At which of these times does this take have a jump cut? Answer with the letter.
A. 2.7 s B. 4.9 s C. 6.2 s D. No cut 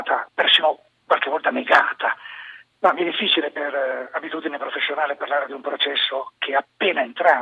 A